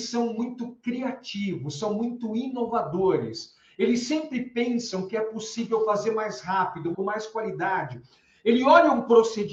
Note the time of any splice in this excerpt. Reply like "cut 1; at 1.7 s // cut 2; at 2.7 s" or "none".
cut 1; at 6.9 s